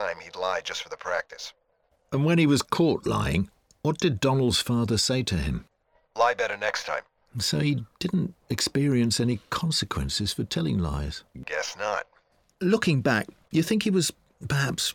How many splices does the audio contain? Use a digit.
0